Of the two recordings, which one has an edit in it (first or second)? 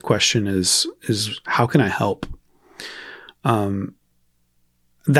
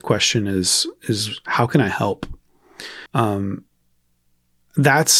second